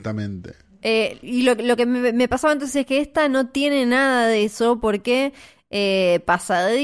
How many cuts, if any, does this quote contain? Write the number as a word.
one